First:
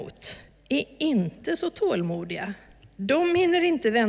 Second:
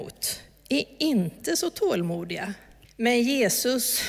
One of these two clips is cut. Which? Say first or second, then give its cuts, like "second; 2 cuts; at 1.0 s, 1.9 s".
second; 1 cut; at 2.8 s